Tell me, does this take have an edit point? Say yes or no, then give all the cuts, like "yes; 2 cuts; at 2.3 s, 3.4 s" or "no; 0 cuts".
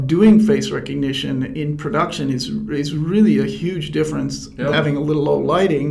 yes; 1 cut; at 4.7 s